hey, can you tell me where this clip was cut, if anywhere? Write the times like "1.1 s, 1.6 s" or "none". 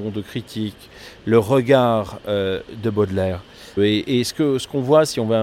3.8 s